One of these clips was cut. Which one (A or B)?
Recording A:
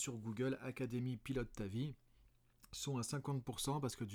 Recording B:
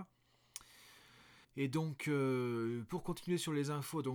B